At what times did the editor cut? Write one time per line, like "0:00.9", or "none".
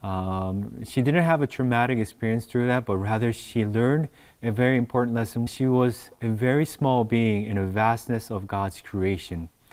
0:05.5